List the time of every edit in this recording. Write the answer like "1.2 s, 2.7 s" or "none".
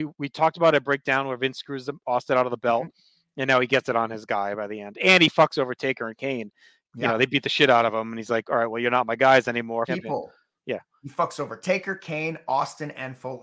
9.9 s